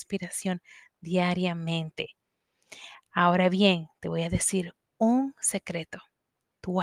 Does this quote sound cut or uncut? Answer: uncut